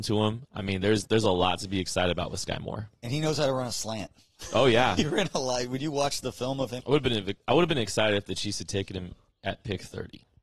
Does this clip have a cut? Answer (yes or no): yes